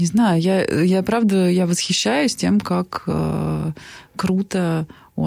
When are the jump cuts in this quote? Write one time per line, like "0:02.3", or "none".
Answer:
none